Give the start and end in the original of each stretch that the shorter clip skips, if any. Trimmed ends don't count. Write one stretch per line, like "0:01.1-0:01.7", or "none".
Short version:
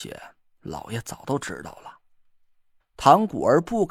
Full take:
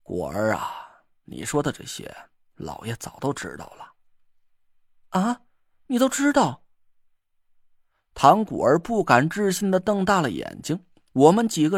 0:04.7-0:08.0